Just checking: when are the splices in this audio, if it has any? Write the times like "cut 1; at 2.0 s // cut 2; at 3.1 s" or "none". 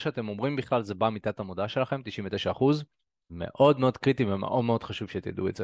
cut 1; at 3.3 s